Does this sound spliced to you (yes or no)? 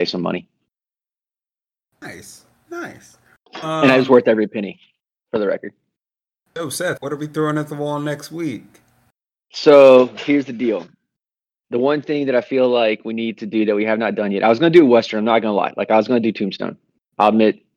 yes